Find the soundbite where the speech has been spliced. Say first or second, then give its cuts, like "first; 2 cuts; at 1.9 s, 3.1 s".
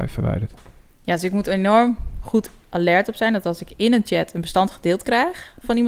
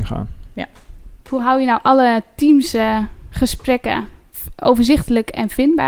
second; 1 cut; at 1.2 s